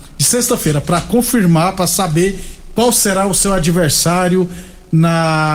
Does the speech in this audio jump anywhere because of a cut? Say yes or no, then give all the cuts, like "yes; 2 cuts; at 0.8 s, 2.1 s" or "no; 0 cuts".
no; 0 cuts